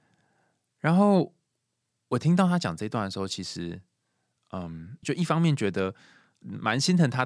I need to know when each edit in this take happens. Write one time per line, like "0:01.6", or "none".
0:05.0